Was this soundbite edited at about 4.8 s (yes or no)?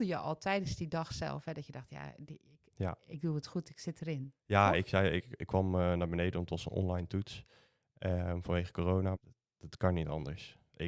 no